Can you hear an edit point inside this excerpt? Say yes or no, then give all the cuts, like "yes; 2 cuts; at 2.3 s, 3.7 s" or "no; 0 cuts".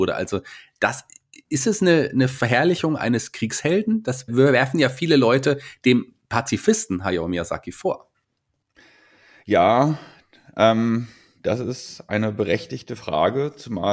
yes; 1 cut; at 4.3 s